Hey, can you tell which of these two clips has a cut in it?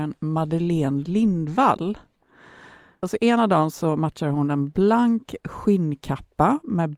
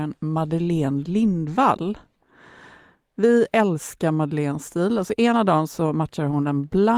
first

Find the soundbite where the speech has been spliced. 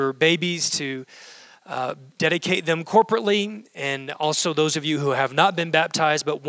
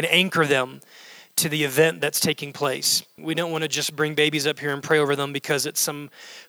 second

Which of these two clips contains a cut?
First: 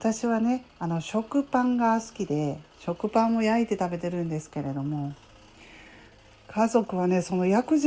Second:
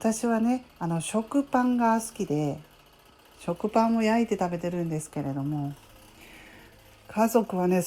first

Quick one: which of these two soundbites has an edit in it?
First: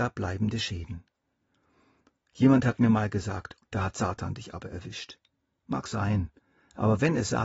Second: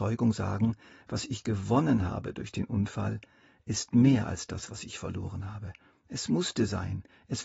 first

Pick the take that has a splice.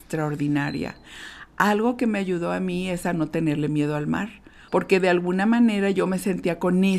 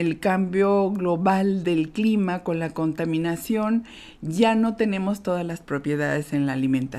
first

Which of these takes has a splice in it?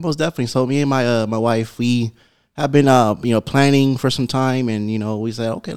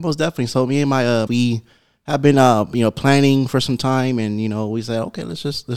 second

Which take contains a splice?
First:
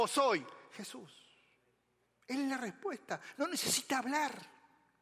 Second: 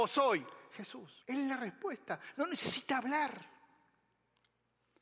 second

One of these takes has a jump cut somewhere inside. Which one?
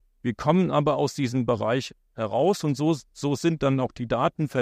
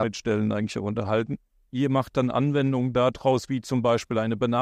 second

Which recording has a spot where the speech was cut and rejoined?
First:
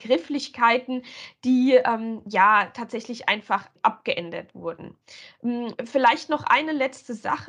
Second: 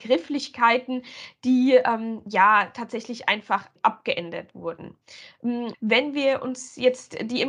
second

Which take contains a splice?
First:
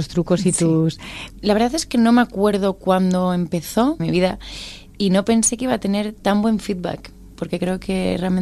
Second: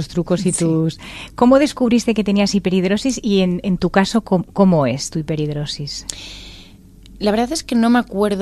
first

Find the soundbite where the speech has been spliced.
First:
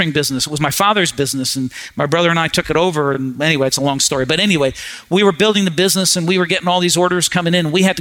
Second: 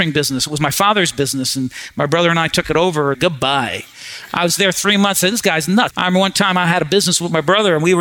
second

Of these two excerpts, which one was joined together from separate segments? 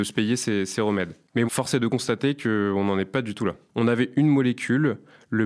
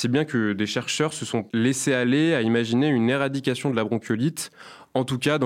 first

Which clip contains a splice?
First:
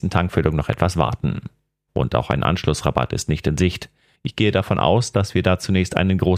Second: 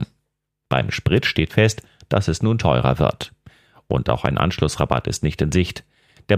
first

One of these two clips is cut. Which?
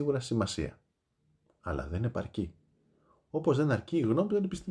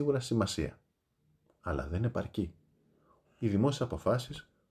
second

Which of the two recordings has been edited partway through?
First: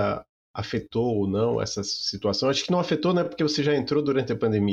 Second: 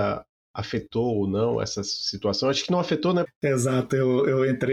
second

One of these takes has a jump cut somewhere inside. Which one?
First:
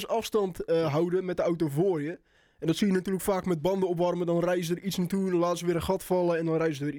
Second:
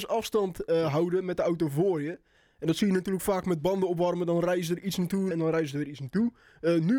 second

